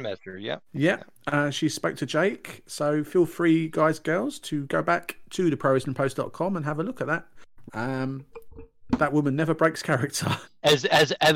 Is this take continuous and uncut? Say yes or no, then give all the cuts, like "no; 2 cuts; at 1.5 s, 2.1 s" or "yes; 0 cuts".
no; 2 cuts; at 7.7 s, 10.4 s